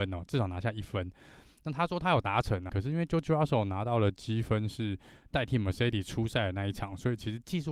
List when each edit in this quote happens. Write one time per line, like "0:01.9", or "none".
0:02.7